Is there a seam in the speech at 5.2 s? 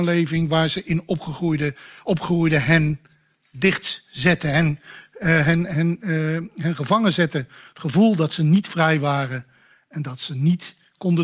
no; 0 cuts

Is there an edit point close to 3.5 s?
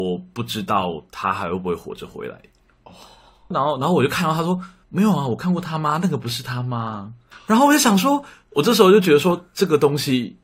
yes; 1 cut; at 3.5 s

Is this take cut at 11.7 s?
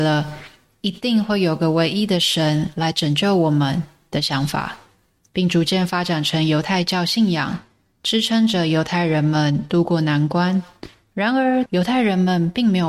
yes; 1 cut; at 11.7 s

